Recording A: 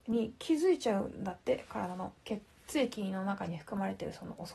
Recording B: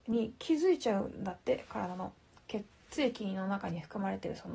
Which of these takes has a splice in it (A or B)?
A